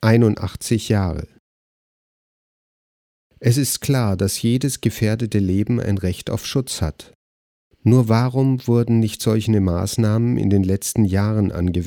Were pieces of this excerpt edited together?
no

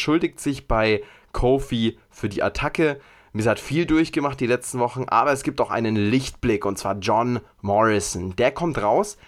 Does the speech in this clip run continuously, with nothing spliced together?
yes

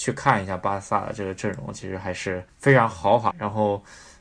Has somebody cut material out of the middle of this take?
yes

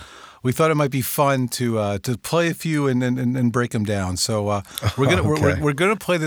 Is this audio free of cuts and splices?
yes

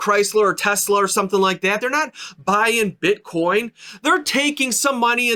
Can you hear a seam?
no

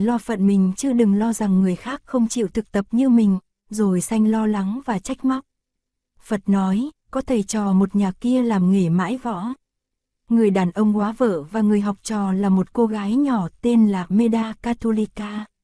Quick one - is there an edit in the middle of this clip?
no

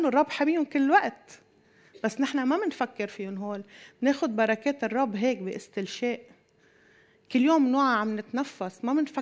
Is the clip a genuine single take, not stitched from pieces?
yes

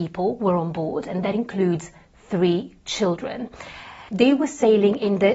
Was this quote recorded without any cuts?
no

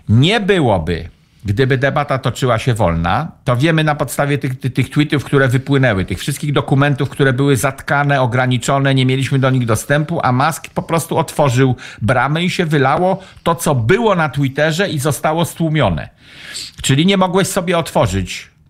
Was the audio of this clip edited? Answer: no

